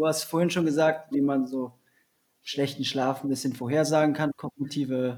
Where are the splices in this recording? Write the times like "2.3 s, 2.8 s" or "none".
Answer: 1.1 s, 4.3 s

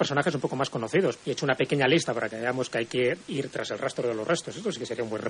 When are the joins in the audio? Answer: 1.2 s

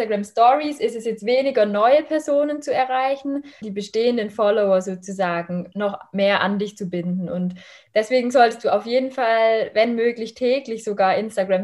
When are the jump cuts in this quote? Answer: 3.6 s

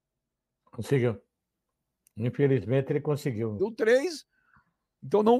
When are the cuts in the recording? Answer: 3.6 s

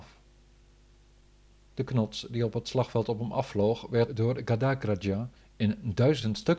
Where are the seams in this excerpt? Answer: none

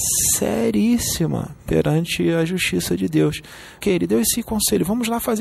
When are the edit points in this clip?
3.8 s

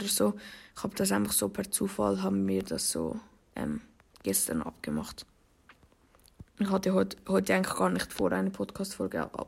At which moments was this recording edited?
none

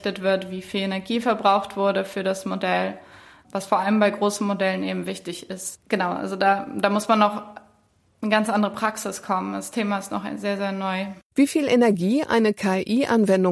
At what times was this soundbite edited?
none

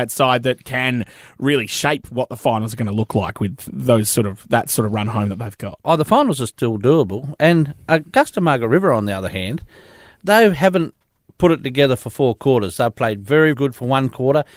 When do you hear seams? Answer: 13.5 s

